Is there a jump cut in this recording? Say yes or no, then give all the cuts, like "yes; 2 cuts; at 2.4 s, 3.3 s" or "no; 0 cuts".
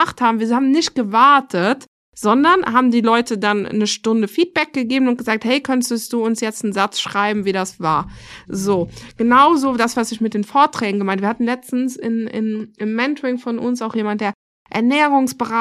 no; 0 cuts